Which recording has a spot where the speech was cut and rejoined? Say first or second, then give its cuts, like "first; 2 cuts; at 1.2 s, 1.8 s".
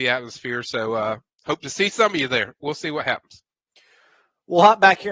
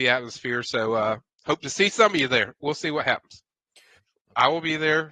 second; 1 cut; at 4.0 s